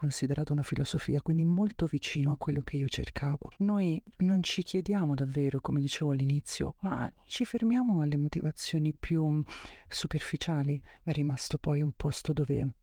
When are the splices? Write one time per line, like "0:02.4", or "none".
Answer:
0:03.6
0:06.8
0:11.0